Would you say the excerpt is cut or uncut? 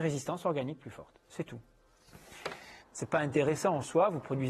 cut